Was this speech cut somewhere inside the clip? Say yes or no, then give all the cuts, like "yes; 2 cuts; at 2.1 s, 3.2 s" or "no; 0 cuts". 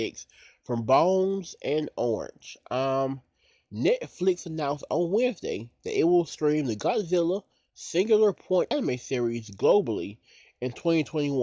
no; 0 cuts